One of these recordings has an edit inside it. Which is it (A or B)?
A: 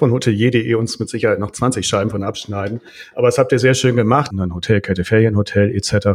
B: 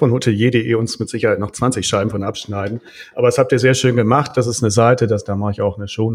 A